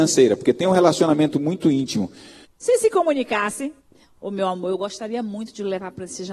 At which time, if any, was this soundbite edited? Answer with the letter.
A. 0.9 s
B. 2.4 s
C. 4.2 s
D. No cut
B